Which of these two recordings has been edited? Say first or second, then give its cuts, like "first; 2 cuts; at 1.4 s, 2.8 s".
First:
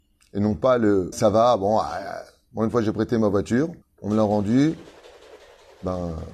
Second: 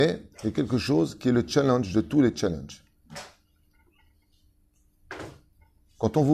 first; 2 cuts; at 1.1 s, 3.8 s